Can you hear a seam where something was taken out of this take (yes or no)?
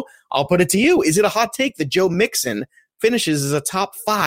no